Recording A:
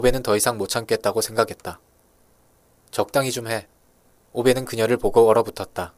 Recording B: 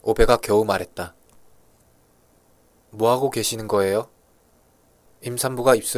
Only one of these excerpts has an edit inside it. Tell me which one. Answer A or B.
A